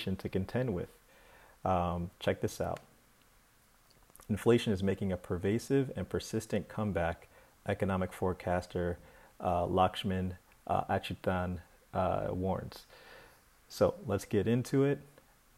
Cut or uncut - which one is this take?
uncut